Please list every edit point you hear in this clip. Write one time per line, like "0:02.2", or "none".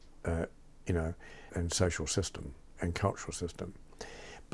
0:01.5